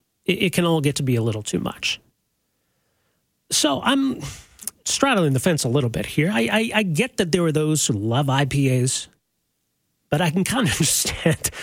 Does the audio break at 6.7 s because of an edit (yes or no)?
no